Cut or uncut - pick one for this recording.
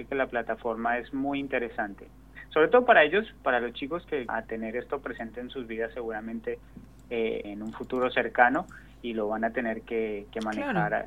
cut